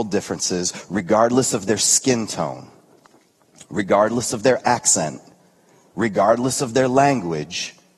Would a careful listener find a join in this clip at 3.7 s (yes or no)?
no